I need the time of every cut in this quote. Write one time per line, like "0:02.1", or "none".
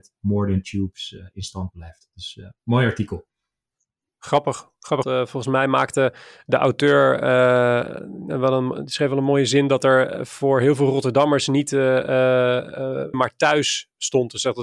0:05.0
0:13.1